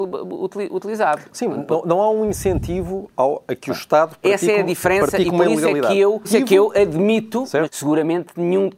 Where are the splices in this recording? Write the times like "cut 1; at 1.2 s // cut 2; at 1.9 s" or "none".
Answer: cut 1; at 6.2 s // cut 2; at 7.6 s